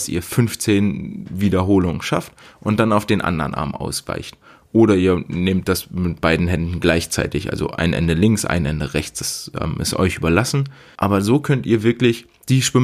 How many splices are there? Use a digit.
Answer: 0